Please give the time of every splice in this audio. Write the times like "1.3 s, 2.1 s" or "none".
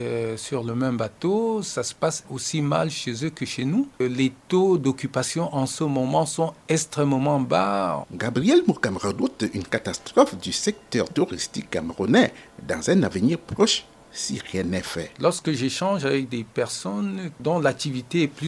8.0 s